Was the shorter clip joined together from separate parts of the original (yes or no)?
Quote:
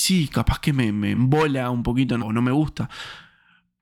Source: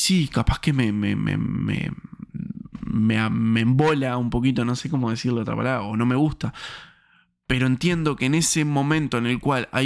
yes